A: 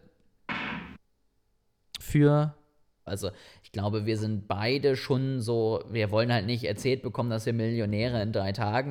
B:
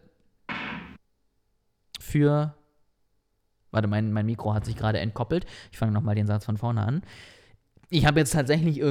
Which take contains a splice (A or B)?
A